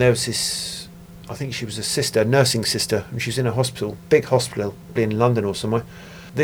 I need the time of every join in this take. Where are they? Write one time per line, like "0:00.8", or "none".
0:05.0